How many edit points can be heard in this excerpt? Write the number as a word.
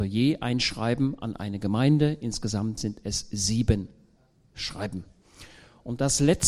zero